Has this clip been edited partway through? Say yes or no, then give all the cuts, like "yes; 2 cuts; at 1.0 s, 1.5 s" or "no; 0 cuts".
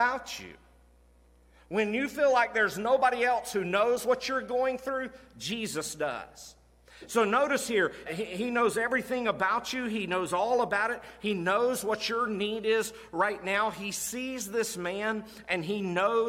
yes; 1 cut; at 8.1 s